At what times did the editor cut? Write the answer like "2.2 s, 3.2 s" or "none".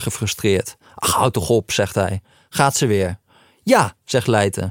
none